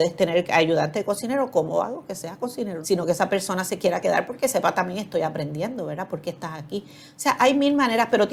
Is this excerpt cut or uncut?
cut